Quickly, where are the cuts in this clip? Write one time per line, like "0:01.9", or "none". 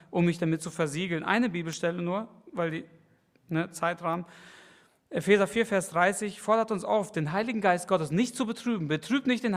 none